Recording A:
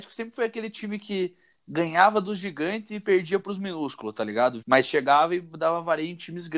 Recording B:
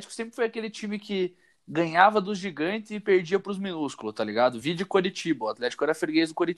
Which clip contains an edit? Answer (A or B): A